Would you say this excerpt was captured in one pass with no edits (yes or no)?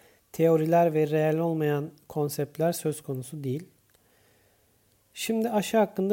yes